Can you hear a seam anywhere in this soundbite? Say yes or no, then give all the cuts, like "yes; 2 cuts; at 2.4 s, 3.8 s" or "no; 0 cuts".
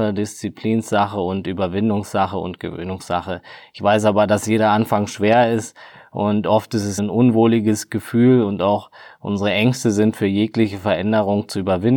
yes; 1 cut; at 7.0 s